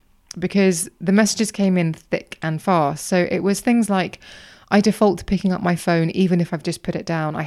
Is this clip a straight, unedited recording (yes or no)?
yes